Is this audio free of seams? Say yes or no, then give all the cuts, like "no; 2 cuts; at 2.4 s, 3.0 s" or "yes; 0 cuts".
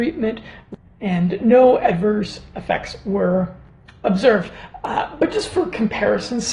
yes; 0 cuts